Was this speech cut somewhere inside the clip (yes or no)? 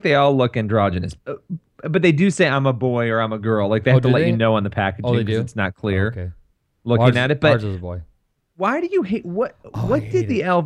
yes